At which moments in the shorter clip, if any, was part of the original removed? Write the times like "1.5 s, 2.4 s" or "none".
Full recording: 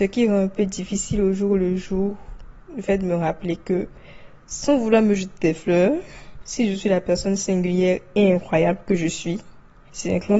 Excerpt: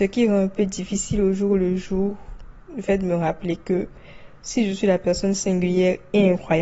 4.4 s